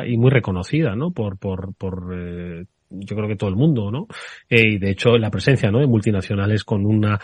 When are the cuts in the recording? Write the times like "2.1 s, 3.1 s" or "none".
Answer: none

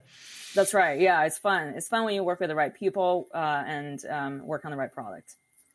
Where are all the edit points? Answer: none

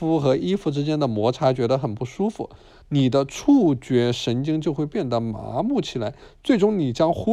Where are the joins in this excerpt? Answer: 2.8 s

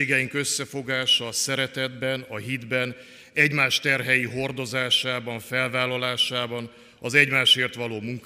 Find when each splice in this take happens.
none

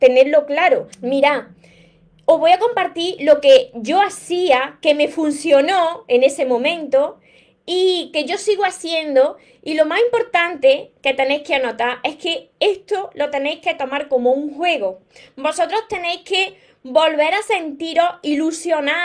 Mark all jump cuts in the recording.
0.9 s

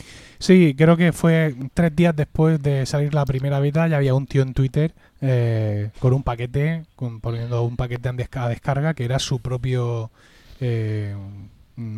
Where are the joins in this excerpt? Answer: none

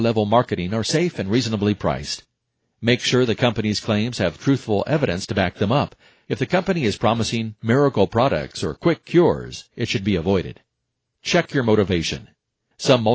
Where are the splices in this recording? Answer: none

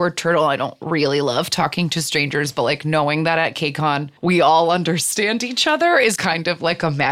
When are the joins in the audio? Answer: 4.2 s, 6.2 s

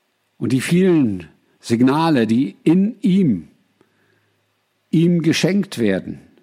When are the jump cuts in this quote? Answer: none

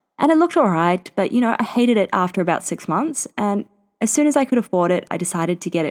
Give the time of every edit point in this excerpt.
none

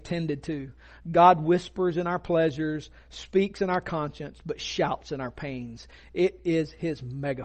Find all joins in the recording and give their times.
none

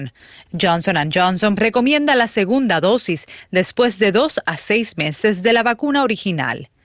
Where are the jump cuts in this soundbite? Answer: 1.6 s

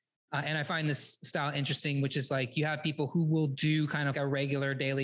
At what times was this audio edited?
4.1 s

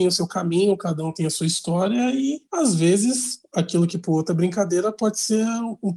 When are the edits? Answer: none

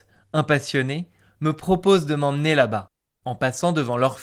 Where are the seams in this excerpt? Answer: 3.2 s

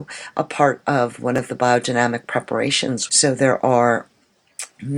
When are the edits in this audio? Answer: 3.1 s

